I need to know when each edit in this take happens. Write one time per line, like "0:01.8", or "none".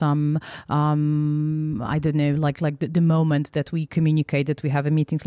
none